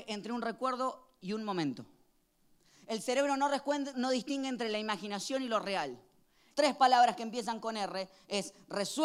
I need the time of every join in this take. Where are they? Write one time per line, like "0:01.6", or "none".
0:03.9
0:06.5